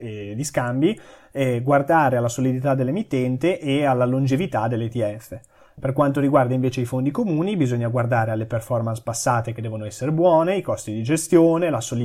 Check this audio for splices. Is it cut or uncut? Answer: uncut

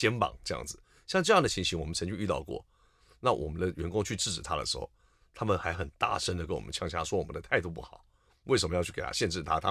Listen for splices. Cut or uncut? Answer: uncut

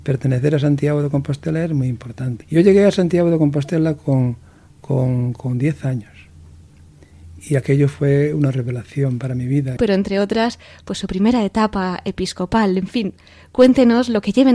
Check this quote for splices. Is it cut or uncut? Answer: cut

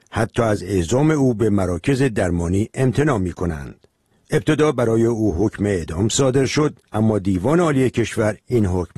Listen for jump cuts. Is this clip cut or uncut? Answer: cut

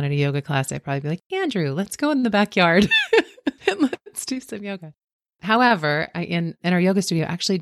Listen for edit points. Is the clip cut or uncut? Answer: uncut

